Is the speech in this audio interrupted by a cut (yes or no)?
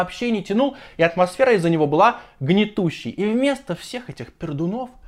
no